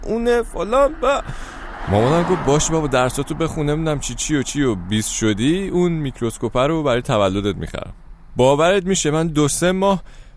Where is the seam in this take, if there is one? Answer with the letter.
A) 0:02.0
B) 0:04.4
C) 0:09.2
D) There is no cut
B